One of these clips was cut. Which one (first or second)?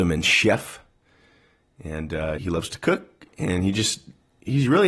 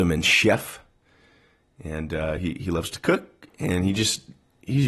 first